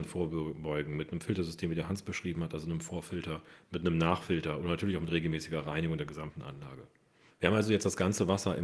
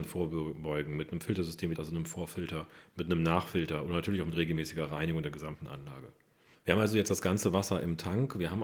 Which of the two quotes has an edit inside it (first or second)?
second